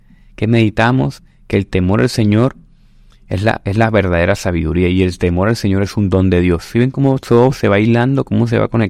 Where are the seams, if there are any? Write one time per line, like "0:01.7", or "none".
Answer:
none